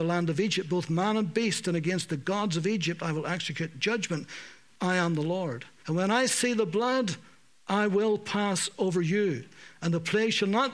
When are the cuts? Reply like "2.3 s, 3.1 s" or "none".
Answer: 5.8 s